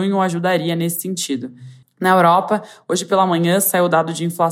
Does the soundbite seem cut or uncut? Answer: cut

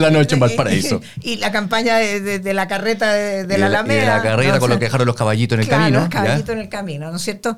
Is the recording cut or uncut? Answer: uncut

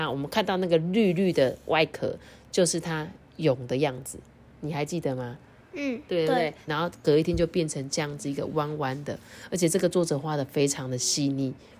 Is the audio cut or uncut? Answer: cut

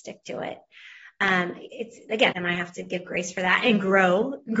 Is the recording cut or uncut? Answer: cut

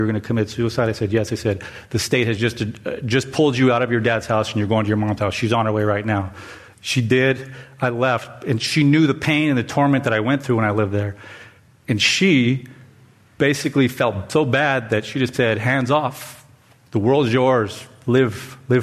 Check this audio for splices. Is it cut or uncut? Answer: cut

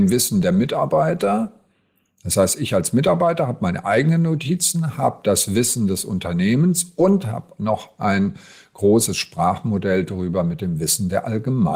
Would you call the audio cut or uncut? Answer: uncut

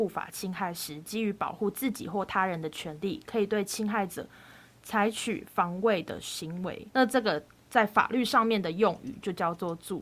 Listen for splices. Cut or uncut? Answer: cut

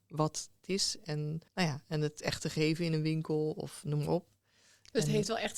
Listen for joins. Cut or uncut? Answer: cut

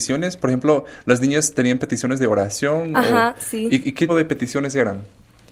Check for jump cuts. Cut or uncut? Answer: cut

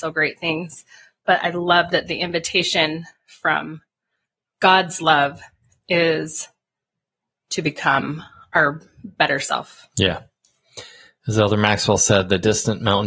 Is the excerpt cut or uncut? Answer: uncut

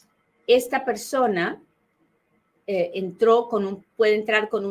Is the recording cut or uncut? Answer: uncut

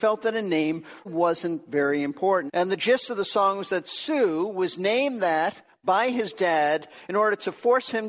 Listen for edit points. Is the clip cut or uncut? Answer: cut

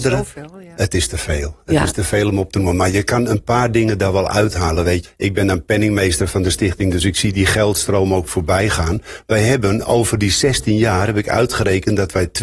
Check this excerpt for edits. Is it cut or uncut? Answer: cut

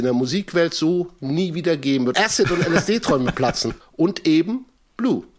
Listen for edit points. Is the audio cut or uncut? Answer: cut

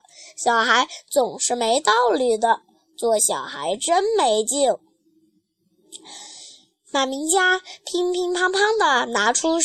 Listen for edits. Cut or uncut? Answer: uncut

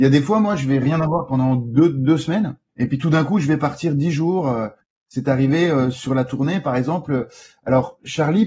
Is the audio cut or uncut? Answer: uncut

